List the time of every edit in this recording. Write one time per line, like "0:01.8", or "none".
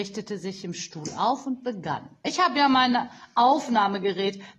0:02.2